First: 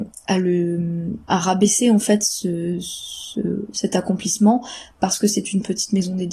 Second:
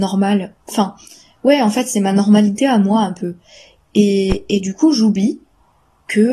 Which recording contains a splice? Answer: first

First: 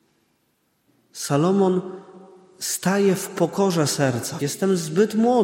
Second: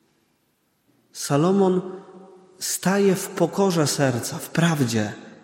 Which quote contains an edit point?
first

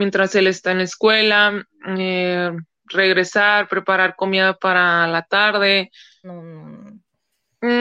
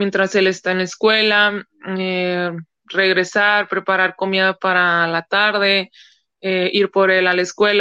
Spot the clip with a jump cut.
first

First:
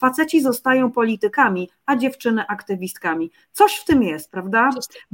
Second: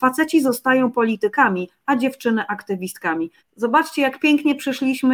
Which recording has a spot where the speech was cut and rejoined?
second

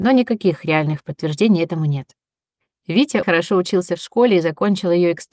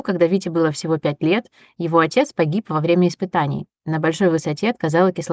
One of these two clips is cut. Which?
first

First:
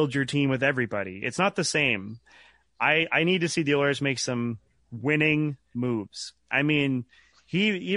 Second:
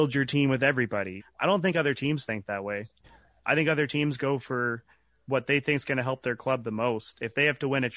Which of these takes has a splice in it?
second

